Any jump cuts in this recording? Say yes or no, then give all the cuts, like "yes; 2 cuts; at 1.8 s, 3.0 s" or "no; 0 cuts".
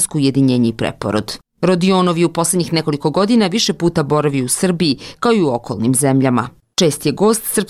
no; 0 cuts